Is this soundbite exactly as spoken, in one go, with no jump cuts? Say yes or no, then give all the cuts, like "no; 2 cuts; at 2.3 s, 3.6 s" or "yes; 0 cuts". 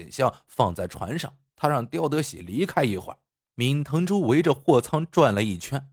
no; 2 cuts; at 1.5 s, 3.4 s